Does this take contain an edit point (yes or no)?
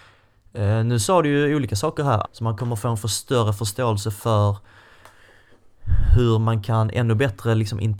yes